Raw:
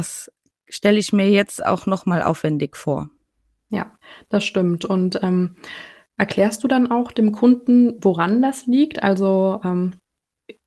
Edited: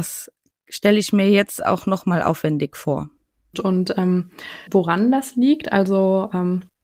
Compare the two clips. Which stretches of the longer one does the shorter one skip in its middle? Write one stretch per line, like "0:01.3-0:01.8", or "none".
0:03.5-0:04.8
0:05.9-0:08.0